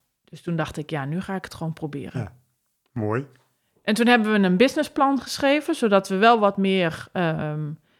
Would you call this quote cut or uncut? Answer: uncut